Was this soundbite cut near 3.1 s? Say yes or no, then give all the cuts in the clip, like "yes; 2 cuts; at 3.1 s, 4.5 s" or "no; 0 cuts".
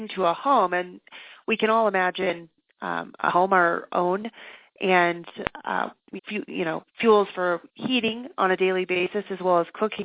no; 1 cut; at 6.2 s